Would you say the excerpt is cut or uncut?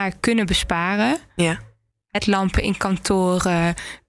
uncut